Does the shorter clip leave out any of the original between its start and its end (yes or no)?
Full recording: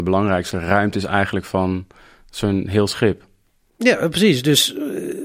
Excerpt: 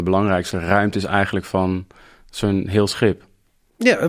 no